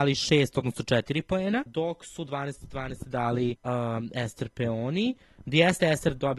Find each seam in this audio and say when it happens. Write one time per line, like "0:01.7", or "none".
0:01.7
0:03.6